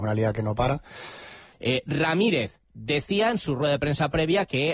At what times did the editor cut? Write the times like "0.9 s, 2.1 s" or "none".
1.5 s, 2.6 s